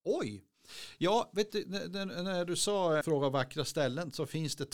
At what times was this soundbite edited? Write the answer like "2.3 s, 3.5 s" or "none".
3.0 s